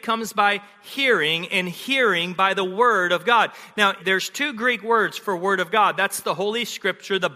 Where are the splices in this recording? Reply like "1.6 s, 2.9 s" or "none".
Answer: 4.0 s, 5.9 s